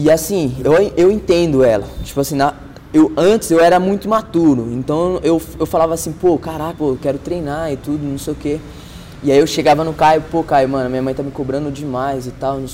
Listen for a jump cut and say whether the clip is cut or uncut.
cut